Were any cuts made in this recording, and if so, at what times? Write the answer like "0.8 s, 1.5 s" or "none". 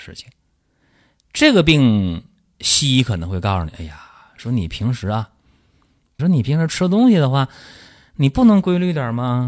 6.2 s